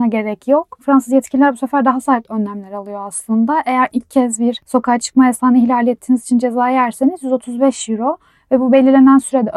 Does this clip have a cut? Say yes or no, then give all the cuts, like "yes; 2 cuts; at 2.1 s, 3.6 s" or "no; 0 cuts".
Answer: no; 0 cuts